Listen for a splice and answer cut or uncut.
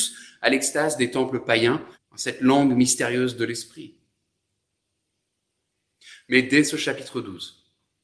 cut